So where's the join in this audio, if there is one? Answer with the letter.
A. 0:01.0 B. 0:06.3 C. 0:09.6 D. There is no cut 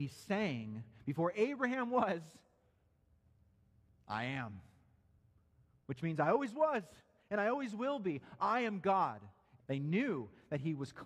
C